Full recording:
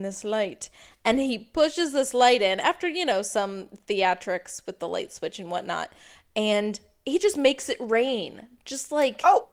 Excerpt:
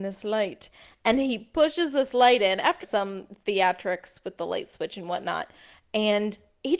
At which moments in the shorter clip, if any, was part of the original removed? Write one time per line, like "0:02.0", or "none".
0:02.8